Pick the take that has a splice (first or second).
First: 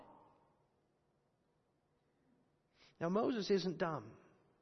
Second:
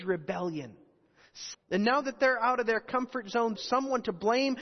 second